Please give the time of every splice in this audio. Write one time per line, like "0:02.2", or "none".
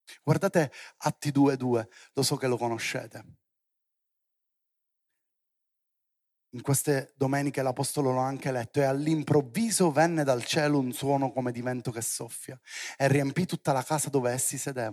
none